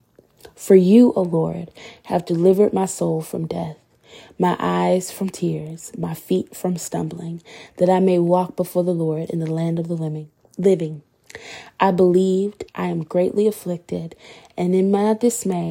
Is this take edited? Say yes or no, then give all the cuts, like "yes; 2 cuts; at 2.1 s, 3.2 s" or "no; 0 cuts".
yes; 1 cut; at 12.7 s